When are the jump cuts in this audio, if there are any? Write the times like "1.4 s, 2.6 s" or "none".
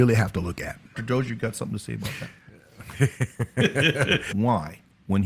0.9 s, 4.3 s